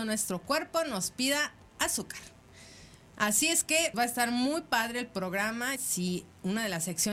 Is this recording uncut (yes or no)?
no